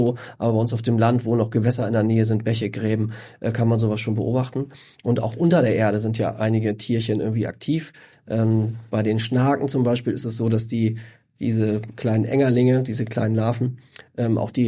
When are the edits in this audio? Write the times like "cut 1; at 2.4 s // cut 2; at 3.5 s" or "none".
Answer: cut 1; at 8.1 s